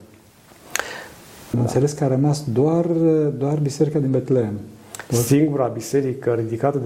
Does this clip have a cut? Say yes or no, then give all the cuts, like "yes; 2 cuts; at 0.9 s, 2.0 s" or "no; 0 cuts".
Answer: yes; 1 cut; at 1.5 s